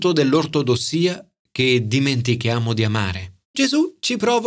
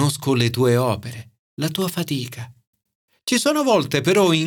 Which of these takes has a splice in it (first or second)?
first